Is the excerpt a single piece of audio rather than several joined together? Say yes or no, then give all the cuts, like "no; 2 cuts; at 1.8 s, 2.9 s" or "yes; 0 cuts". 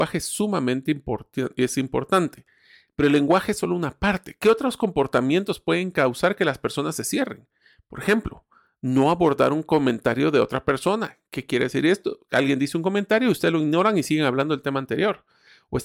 yes; 0 cuts